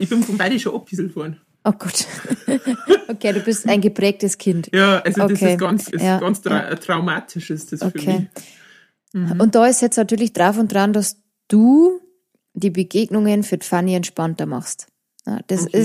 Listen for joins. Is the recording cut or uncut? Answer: cut